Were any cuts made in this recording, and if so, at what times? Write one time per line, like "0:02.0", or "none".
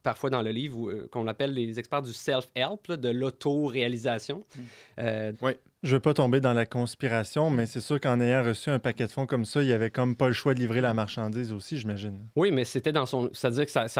0:05.3